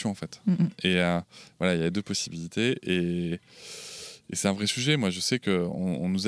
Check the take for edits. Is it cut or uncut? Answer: uncut